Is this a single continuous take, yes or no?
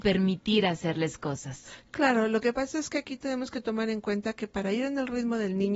yes